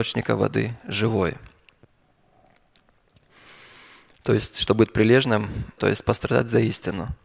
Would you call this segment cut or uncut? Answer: cut